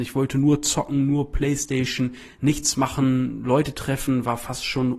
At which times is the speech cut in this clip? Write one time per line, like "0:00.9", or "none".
none